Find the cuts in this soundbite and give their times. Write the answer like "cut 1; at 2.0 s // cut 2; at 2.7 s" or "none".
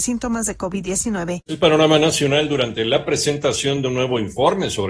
cut 1; at 1.4 s